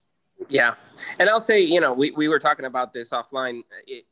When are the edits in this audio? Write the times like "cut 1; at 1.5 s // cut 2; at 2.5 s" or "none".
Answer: none